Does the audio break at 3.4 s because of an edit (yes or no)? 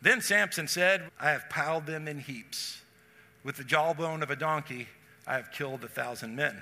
no